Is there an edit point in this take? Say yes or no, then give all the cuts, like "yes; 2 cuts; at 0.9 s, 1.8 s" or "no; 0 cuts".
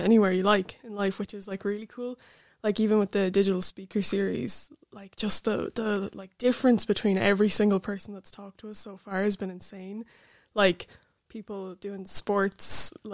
no; 0 cuts